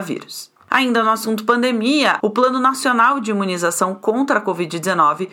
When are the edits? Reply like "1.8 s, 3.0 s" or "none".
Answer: 2.2 s